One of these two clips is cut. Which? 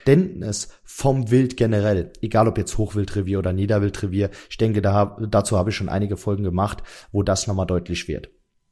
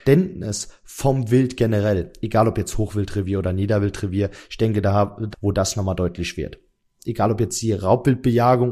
second; 2 cuts; at 5.3 s, 7.0 s

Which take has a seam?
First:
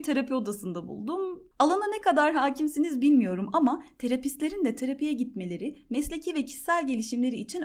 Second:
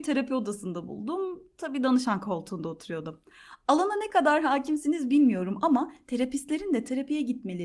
first; 1 cut; at 1.5 s

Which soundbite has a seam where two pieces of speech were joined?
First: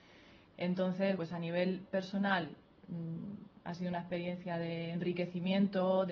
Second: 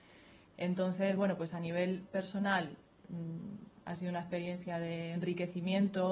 first; 1 cut; at 1.2 s

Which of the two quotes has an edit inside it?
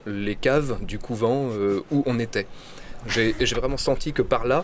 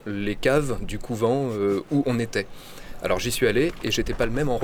first; 1 cut; at 3.0 s

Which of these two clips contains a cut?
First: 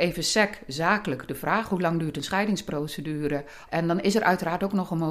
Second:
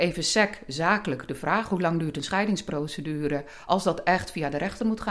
first; 1 cut; at 3.7 s

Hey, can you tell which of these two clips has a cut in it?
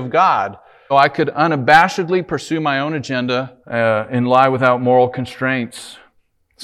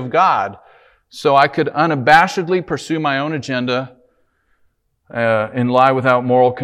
first; 2 cuts; at 0.9 s, 3.6 s

